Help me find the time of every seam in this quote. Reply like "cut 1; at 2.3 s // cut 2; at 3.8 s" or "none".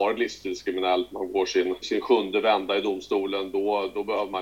cut 1; at 1.8 s